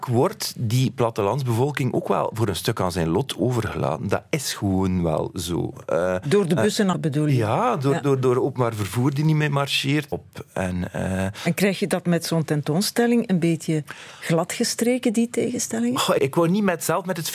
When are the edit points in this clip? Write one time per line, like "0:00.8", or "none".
0:06.9
0:10.1
0:16.2